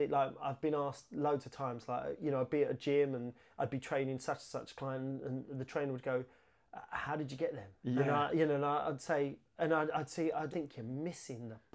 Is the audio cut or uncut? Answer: cut